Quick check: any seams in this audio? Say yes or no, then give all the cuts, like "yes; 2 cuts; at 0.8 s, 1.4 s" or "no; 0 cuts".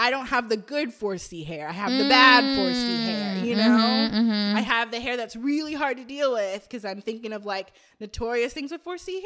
no; 0 cuts